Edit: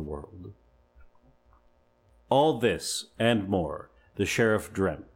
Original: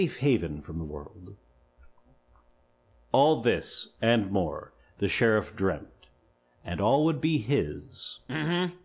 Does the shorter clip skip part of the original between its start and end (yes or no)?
no